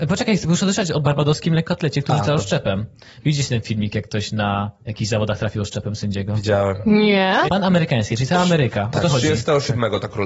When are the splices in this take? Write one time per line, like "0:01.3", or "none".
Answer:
0:07.5